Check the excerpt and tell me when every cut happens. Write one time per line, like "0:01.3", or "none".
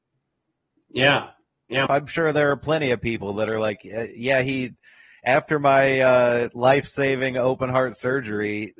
0:01.9